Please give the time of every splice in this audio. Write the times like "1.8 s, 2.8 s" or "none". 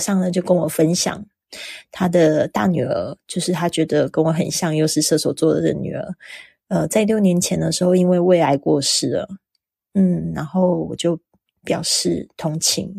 none